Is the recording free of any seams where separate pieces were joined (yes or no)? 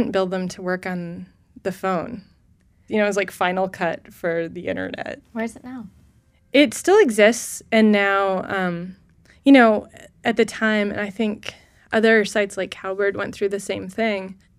no